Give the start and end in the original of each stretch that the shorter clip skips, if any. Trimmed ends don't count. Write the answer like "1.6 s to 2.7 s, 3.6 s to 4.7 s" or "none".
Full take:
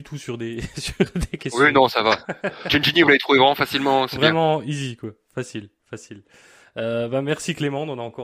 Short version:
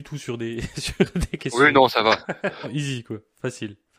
2.6 s to 4.6 s